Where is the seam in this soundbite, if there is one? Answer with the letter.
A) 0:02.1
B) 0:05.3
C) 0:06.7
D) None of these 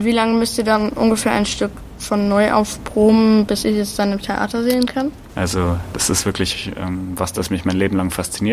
B